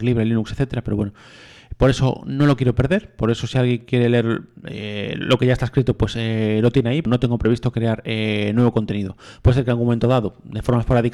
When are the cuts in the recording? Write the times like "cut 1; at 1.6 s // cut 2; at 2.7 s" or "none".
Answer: cut 1; at 7.1 s